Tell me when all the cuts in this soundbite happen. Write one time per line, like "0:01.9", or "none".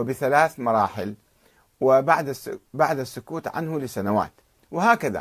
none